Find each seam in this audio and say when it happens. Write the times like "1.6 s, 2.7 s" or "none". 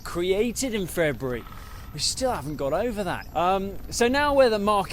3.3 s